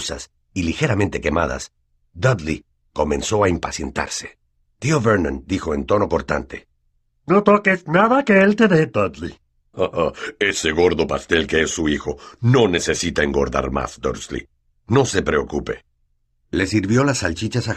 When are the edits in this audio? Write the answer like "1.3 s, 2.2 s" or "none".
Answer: 9.7 s